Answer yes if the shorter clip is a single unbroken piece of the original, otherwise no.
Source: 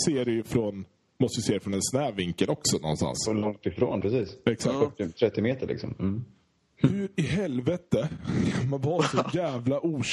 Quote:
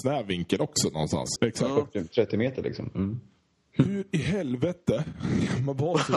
no